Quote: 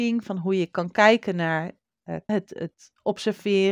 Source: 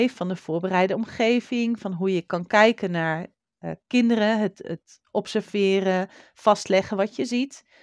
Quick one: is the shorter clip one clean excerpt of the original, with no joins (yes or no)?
no